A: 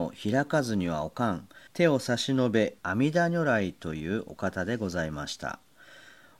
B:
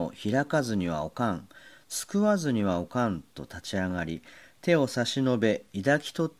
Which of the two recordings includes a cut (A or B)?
A